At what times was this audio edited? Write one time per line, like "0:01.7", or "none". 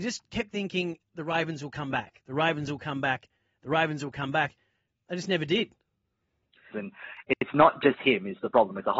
0:06.7